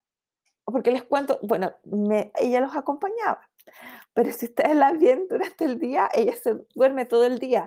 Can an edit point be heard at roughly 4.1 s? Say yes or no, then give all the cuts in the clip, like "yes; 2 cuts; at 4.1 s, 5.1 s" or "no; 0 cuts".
no; 2 cuts; at 2.3 s, 6.7 s